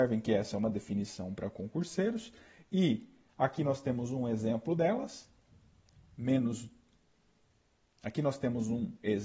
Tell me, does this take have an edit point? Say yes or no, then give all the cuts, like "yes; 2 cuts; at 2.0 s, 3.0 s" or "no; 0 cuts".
yes; 1 cut; at 7.9 s